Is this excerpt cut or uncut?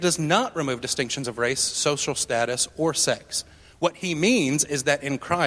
uncut